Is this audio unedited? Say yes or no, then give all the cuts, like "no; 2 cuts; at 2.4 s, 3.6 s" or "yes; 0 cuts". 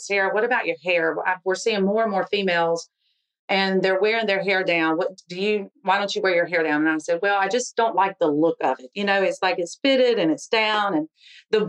yes; 0 cuts